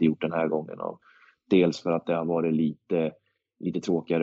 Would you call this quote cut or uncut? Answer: uncut